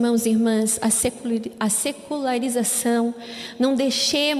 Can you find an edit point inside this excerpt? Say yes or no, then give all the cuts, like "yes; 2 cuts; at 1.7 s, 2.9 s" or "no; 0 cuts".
no; 0 cuts